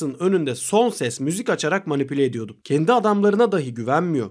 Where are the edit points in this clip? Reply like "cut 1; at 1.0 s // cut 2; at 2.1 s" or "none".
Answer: none